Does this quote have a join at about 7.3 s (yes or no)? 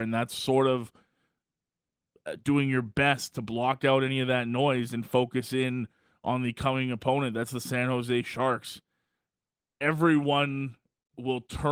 no